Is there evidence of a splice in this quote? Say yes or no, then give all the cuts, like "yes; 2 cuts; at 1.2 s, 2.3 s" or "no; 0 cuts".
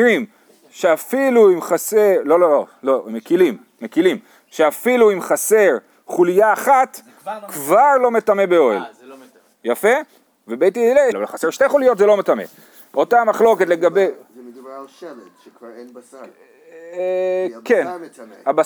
yes; 1 cut; at 11.1 s